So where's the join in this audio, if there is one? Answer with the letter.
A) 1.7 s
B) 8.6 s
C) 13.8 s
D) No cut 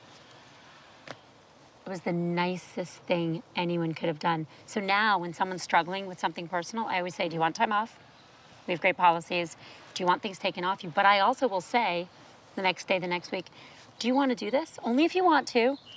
C